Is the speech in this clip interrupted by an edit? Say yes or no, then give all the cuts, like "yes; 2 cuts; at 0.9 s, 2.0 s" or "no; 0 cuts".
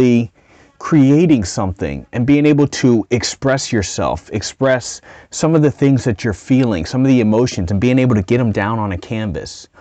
no; 0 cuts